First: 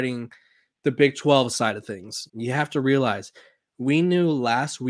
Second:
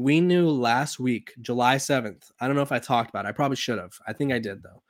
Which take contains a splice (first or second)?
first